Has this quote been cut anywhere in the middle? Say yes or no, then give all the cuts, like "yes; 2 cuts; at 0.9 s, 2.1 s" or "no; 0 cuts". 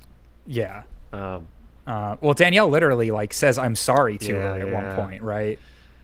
no; 0 cuts